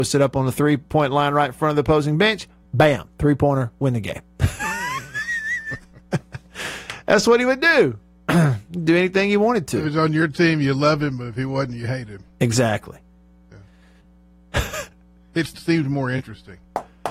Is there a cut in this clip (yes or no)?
yes